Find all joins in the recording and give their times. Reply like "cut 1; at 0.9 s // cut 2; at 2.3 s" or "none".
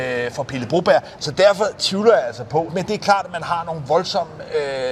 cut 1; at 1.2 s // cut 2; at 2.7 s